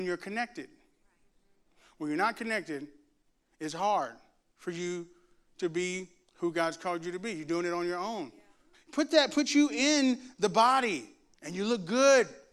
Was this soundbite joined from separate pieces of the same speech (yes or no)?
yes